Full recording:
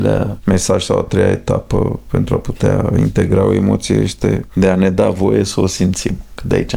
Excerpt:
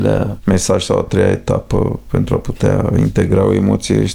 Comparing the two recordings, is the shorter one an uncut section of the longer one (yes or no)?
yes